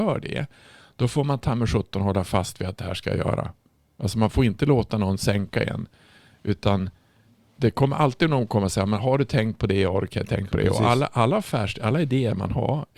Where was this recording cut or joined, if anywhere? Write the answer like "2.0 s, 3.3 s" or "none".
none